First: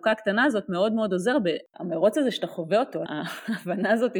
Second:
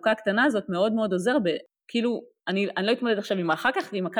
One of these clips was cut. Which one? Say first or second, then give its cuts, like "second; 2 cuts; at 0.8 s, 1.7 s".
first; 2 cuts; at 1.7 s, 3.1 s